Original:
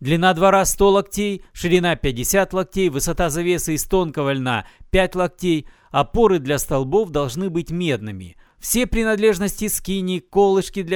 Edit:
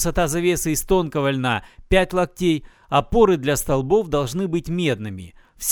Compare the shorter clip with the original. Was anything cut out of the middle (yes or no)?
no